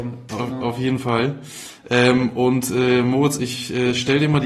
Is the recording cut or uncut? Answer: uncut